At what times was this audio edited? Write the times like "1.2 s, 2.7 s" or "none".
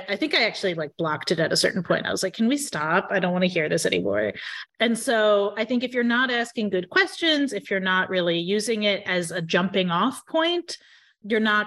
4.6 s